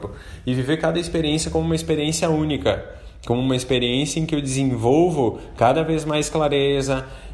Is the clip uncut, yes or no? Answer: yes